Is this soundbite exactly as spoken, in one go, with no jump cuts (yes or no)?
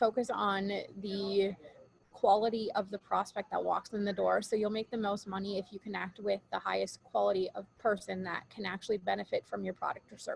yes